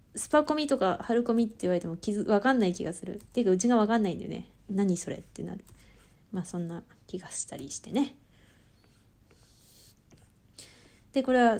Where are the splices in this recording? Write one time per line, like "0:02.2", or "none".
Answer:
0:06.2